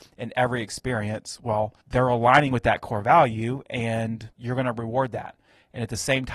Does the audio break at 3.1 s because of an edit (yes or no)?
no